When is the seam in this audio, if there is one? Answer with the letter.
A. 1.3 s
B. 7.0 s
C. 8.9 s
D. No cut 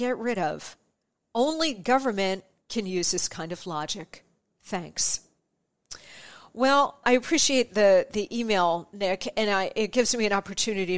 B